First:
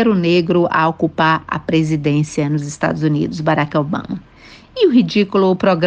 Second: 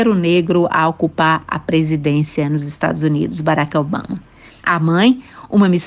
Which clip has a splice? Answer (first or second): second